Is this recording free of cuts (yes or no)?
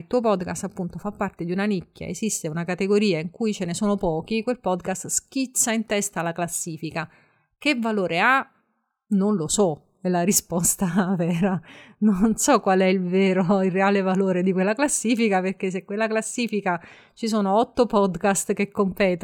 yes